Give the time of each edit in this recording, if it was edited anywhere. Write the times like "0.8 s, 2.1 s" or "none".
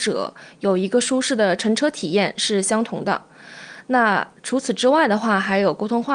none